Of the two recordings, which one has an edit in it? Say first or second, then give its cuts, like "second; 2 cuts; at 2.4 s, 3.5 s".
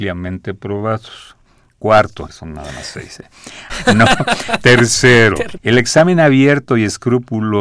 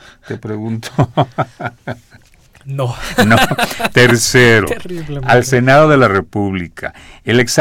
first; 3 cuts; at 2.3 s, 3.7 s, 5.6 s